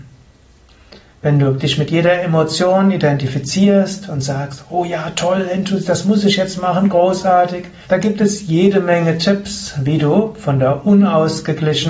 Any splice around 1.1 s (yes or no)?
yes